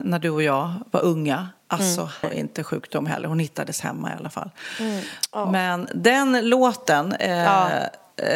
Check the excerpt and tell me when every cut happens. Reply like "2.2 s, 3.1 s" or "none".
2.2 s